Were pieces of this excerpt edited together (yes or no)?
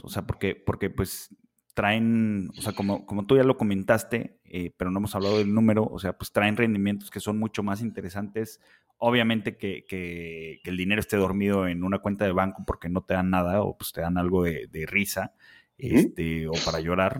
no